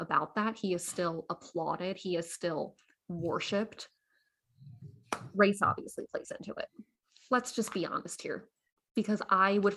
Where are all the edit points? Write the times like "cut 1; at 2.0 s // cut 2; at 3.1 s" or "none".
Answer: none